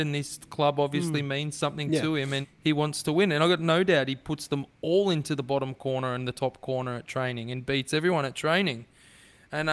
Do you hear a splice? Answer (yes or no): yes